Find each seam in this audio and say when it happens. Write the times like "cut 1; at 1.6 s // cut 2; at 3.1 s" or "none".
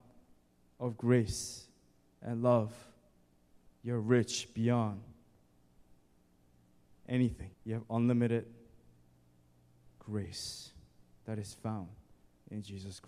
cut 1; at 7.5 s